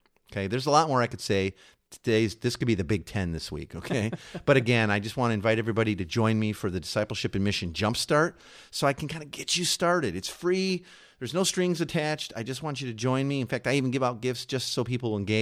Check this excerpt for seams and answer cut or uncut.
uncut